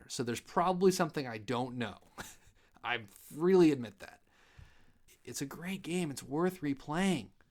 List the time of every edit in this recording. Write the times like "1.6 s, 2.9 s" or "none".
5.1 s